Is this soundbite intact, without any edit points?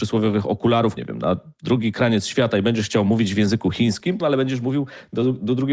no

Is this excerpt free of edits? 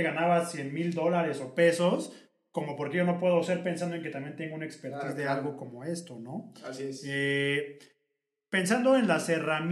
yes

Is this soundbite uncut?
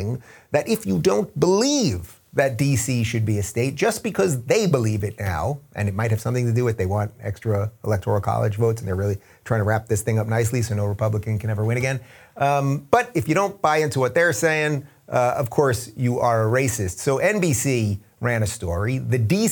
yes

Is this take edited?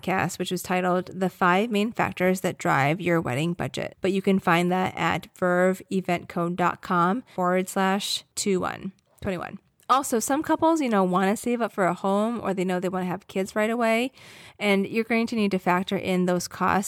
yes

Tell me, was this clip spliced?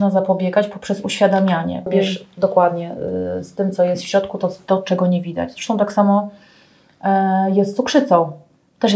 yes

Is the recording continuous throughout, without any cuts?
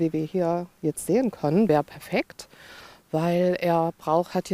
yes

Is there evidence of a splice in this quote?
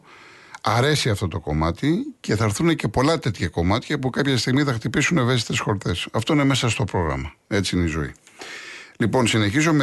no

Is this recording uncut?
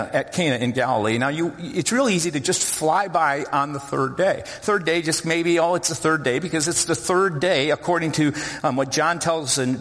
yes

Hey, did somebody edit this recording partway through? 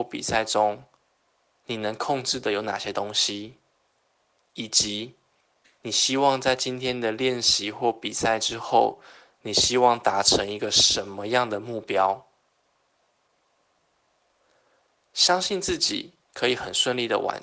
no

